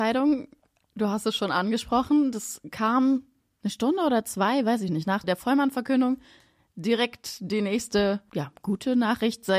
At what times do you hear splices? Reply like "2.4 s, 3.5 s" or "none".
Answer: 5.2 s